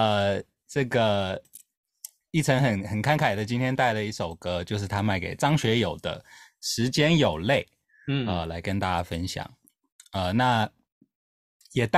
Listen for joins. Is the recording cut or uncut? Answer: uncut